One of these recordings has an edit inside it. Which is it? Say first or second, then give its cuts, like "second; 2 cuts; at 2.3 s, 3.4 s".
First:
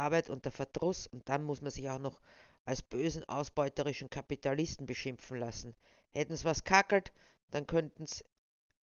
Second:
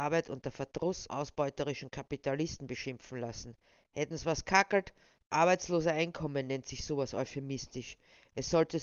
second; 2 cuts; at 1.1 s, 5.2 s